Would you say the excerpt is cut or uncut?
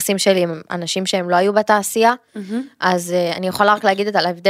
uncut